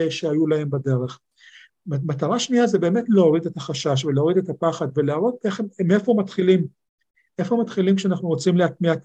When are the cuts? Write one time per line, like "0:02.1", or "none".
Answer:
none